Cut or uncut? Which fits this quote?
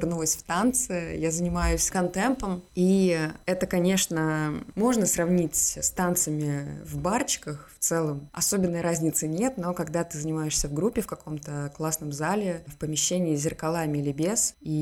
uncut